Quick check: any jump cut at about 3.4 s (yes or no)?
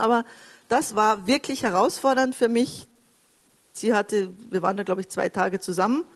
no